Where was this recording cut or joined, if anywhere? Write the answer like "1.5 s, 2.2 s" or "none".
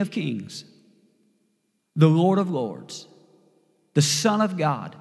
none